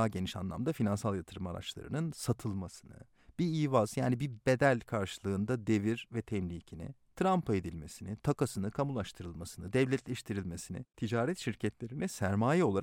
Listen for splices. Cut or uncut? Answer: uncut